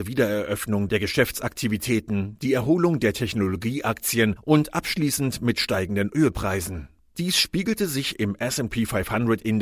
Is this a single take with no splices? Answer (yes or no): yes